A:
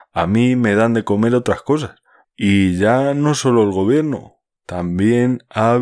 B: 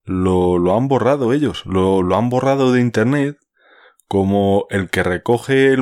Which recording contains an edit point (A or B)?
A